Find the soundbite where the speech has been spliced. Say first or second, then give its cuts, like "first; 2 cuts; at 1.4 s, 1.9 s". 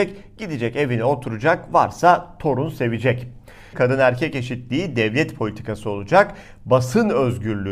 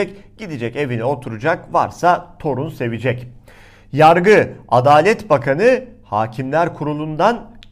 first; 1 cut; at 3.7 s